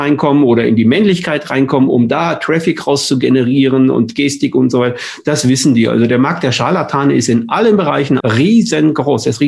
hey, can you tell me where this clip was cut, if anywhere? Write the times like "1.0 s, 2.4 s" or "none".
8.2 s